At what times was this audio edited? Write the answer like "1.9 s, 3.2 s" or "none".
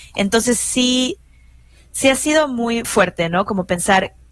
2.8 s